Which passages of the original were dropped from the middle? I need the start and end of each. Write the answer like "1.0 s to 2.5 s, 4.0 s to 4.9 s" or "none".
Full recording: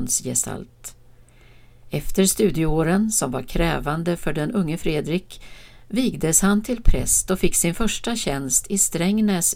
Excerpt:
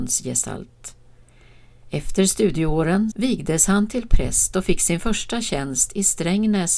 3.1 s to 5.9 s